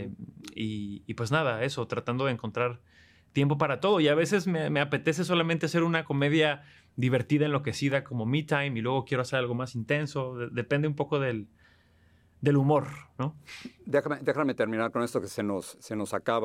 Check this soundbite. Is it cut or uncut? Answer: uncut